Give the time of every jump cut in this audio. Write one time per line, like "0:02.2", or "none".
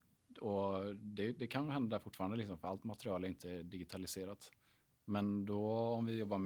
none